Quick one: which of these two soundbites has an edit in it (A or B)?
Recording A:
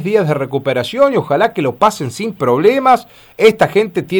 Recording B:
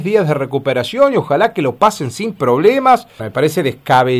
B